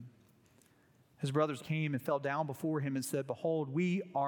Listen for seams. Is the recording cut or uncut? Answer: cut